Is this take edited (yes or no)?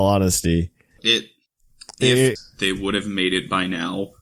yes